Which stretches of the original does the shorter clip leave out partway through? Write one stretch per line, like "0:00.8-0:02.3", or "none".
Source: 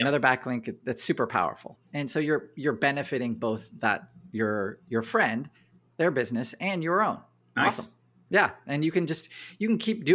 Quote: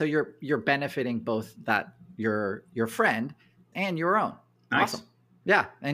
0:05.9-0:06.6